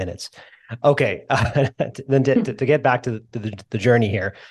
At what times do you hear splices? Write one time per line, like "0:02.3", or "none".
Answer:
none